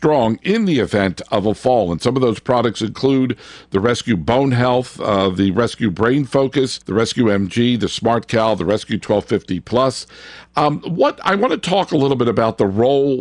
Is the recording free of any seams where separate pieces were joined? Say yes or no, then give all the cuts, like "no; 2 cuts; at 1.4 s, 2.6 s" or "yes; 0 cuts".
no; 1 cut; at 6.8 s